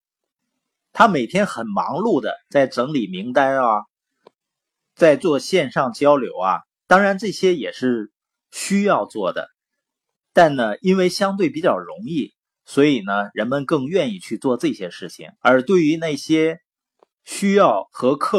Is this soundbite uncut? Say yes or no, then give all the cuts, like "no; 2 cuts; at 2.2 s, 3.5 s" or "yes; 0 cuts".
no; 1 cut; at 15.4 s